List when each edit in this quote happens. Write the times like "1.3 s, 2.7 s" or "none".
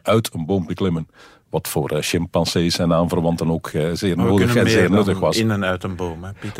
none

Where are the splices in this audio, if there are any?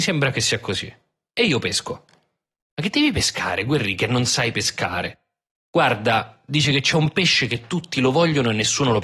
none

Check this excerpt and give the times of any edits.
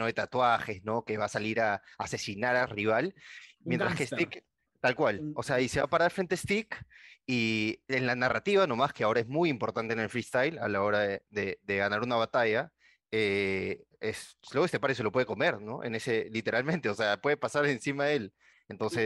none

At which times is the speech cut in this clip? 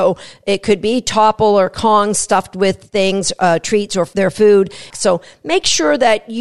4.9 s

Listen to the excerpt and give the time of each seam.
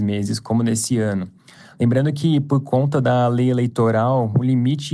none

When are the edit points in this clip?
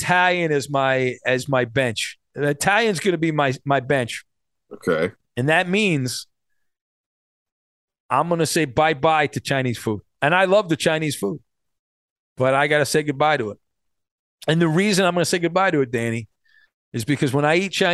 none

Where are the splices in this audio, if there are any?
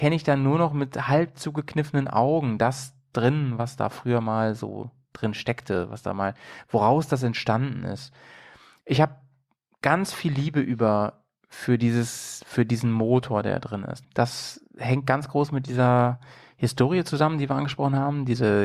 14.0 s

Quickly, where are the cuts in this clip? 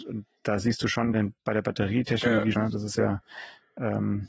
1.1 s, 2.5 s

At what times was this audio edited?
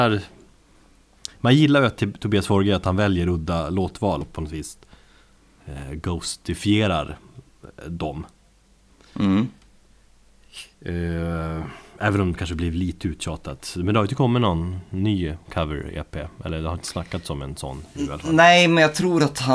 4.2 s

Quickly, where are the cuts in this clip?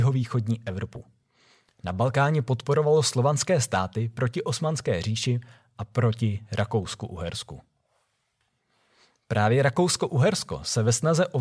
none

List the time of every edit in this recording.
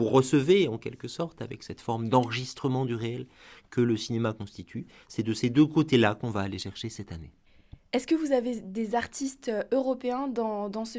none

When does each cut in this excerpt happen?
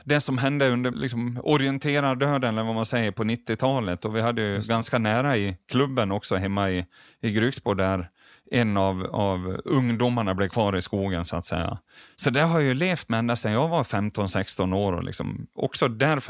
0.9 s

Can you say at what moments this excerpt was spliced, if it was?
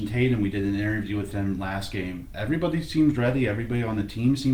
none

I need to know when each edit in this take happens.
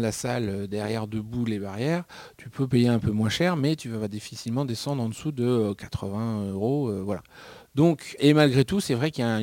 8.2 s

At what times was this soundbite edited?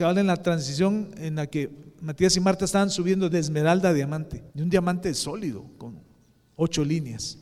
4.5 s

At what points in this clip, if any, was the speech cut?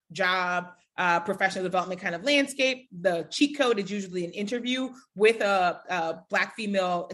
none

